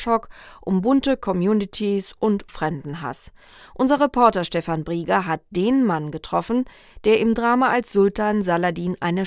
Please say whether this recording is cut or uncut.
cut